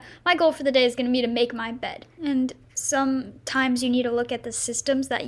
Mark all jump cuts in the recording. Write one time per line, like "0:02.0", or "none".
0:02.2